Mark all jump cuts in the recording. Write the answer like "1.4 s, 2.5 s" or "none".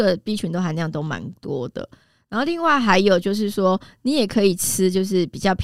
none